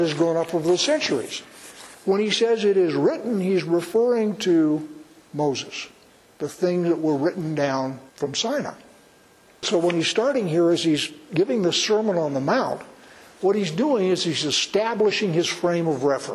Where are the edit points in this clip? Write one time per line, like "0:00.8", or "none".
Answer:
0:08.1